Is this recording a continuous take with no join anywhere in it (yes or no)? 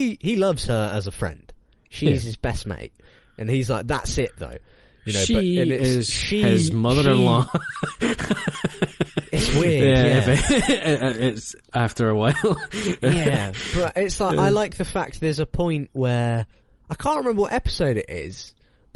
yes